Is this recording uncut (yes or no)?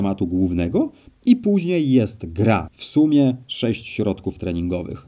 no